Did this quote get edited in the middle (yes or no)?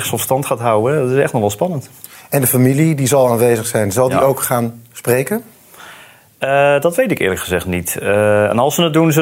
no